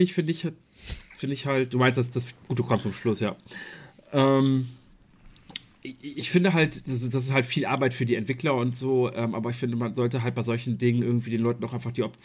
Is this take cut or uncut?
uncut